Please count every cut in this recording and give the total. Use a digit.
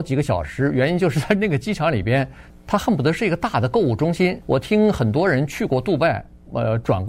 2